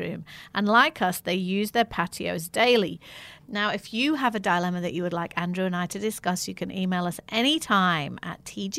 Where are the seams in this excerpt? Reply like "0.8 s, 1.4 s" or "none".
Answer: 3.4 s